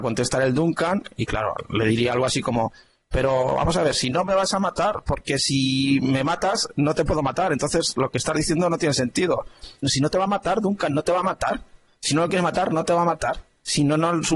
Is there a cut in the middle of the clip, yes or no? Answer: yes